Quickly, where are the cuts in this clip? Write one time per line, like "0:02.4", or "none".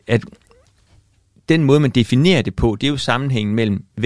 none